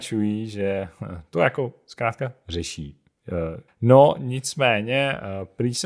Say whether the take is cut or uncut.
cut